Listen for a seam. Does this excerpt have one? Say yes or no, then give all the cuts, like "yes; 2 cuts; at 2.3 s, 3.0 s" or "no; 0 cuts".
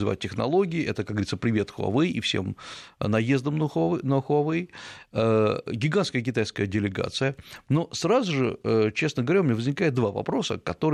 no; 0 cuts